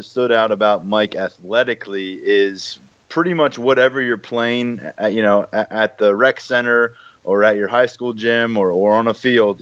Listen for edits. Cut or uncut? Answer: uncut